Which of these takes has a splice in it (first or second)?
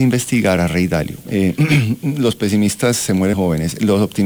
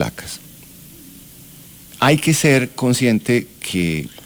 first